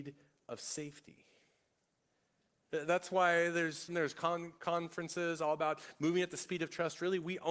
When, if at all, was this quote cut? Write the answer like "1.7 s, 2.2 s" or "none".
3.9 s